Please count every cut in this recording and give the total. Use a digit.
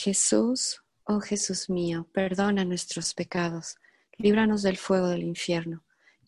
1